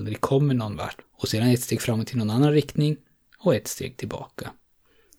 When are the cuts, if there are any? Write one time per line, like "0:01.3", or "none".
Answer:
0:01.0